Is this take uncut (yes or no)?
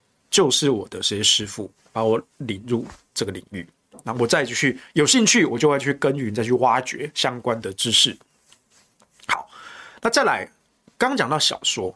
yes